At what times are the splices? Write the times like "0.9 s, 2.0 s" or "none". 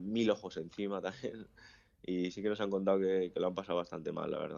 2.3 s